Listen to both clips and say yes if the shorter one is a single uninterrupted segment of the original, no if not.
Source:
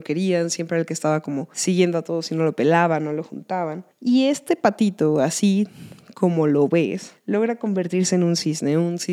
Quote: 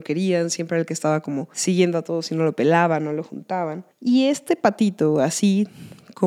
yes